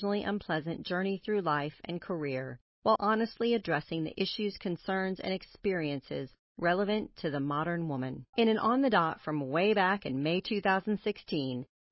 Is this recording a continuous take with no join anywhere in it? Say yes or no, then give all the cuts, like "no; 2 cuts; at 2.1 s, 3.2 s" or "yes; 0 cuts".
no; 2 cuts; at 3.0 s, 8.3 s